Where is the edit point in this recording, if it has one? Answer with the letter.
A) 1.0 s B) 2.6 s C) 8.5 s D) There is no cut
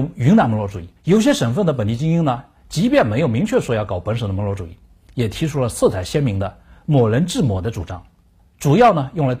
A